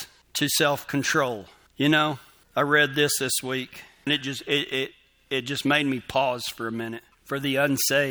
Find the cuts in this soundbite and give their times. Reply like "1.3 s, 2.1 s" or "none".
4.1 s, 7.1 s